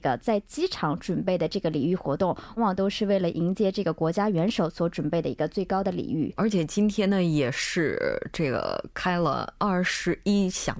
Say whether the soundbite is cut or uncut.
cut